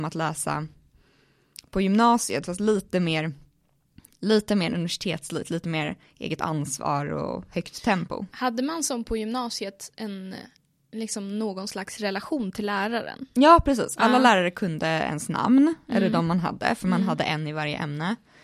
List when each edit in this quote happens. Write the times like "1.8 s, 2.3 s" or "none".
none